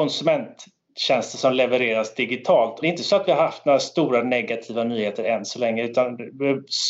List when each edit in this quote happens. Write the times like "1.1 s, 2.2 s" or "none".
2.8 s